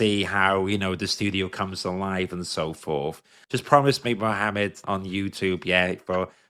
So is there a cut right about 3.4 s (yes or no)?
yes